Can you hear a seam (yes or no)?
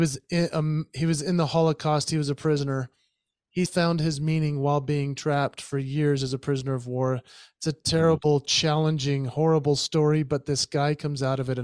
yes